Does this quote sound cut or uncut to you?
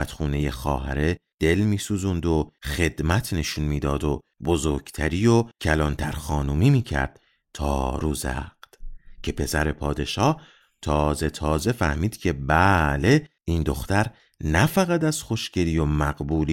cut